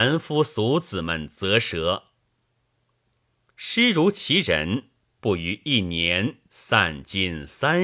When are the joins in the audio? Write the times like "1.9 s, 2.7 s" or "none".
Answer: 5.2 s

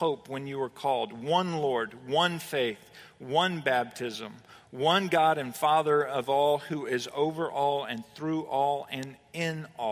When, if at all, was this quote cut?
none

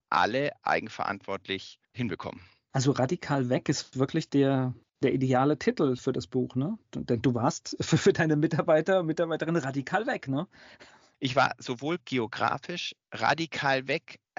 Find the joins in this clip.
none

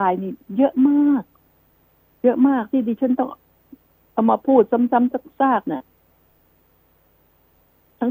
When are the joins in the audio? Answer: none

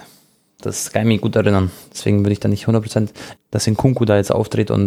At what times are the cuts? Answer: 3.4 s

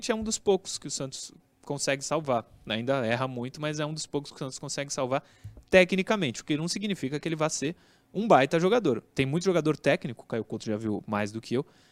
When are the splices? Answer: none

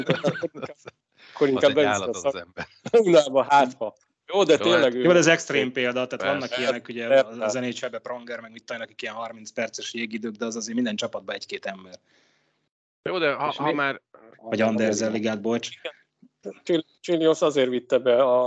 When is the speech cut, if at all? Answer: 14.3 s, 16.4 s

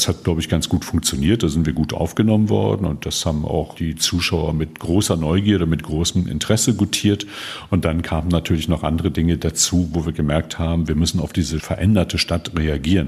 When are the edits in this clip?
3.8 s

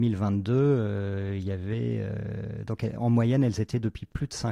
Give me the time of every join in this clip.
none

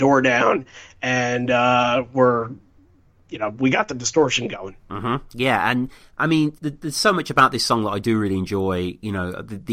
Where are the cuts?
6.6 s

